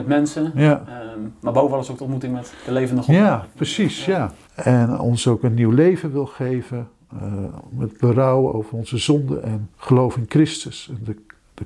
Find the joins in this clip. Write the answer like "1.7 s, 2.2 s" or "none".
4.5 s, 9.7 s